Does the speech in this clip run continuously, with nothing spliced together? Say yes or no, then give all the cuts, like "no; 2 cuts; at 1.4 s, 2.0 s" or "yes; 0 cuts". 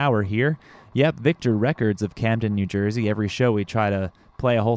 yes; 0 cuts